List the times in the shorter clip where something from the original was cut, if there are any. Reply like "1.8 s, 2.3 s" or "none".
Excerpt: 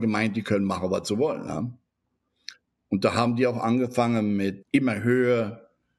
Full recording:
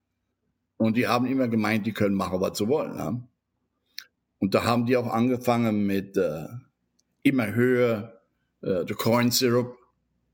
4.6 s